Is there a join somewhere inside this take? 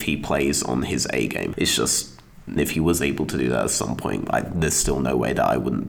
yes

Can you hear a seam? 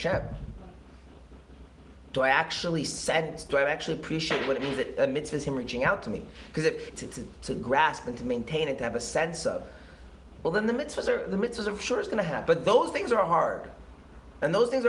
yes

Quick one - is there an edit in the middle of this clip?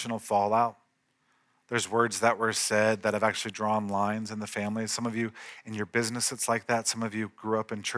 no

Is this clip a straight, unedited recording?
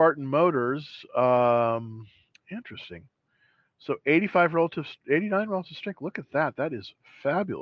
yes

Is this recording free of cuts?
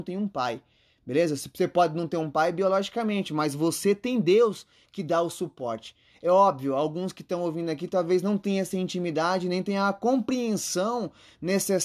yes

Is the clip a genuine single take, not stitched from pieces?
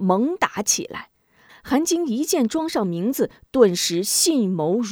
no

